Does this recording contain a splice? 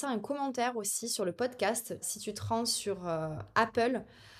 yes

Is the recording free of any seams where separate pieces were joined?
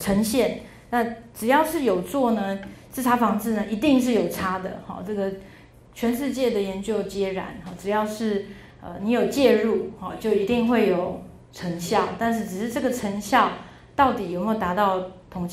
yes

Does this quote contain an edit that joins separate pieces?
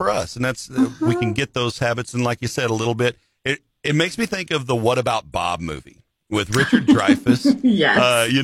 no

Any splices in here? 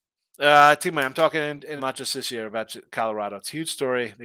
yes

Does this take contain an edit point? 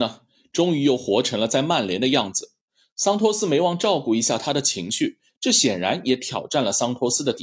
yes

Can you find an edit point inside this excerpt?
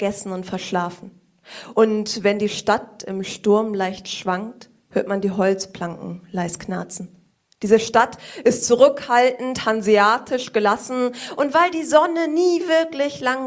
no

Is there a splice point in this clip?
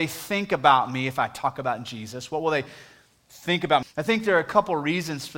yes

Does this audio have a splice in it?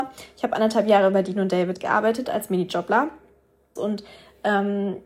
yes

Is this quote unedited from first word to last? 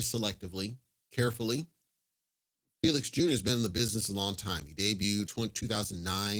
no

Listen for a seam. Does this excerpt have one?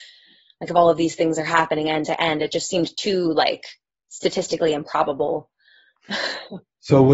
no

